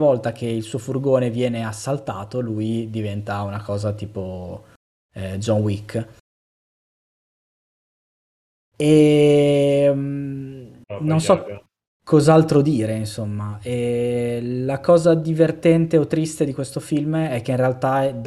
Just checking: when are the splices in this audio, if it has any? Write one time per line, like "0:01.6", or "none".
none